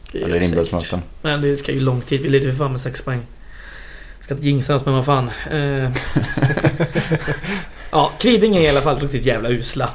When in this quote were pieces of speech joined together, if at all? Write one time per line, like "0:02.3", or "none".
none